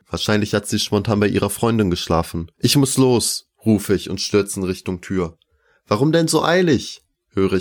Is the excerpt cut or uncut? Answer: cut